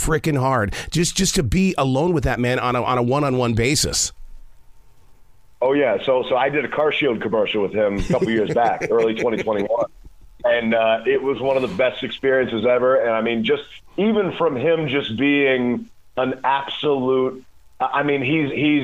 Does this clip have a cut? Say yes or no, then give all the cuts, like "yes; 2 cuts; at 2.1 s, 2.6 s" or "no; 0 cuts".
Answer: no; 0 cuts